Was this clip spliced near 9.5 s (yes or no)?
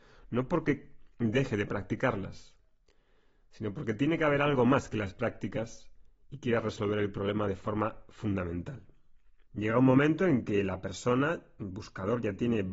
yes